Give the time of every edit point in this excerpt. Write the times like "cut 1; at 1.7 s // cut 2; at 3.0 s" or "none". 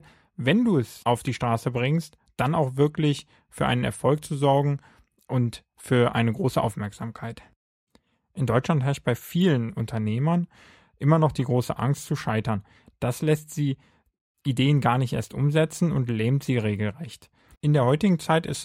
cut 1; at 17.5 s